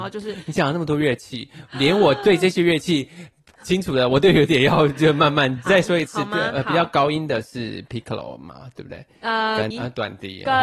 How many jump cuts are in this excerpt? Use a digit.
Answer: 2